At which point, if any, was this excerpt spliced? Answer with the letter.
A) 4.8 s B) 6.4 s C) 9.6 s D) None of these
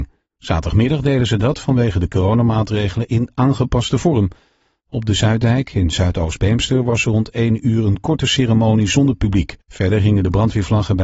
C